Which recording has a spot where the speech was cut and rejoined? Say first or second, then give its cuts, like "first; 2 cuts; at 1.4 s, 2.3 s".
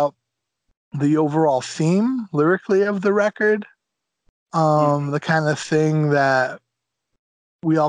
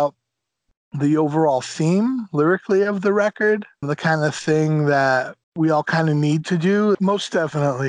second; 3 cuts; at 3.8 s, 5.4 s, 6.9 s